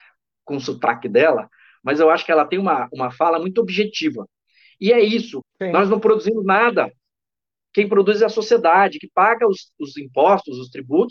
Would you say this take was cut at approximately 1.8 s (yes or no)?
no